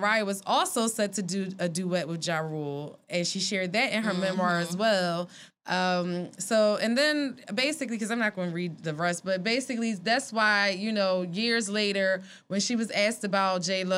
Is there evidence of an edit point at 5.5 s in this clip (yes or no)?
yes